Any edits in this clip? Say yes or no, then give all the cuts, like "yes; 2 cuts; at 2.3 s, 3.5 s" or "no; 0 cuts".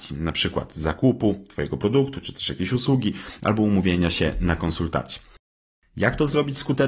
no; 0 cuts